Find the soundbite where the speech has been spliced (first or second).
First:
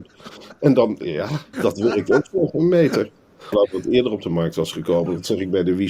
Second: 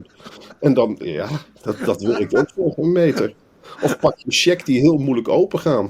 first